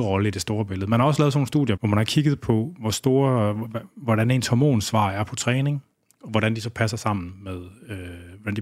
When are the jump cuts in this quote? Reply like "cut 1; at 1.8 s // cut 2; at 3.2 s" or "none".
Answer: cut 1; at 1.8 s